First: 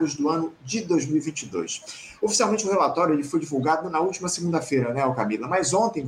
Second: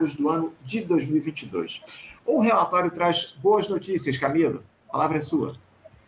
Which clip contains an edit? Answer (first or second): second